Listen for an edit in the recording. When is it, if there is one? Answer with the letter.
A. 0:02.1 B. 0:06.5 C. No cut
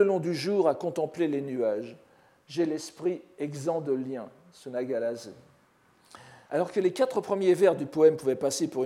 B